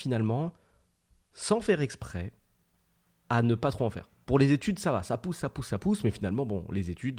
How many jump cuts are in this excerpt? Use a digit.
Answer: 1